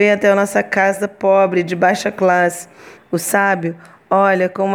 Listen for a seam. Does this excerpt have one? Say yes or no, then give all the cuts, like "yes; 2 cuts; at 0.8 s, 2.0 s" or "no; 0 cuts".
yes; 1 cut; at 3.0 s